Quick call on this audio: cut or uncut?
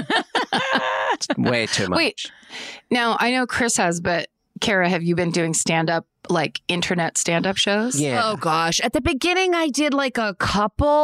uncut